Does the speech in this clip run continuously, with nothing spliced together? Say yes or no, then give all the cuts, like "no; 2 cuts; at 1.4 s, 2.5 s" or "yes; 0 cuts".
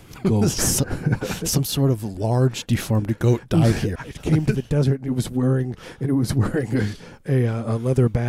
no; 2 cuts; at 3.9 s, 7.2 s